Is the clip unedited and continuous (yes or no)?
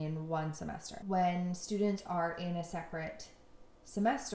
no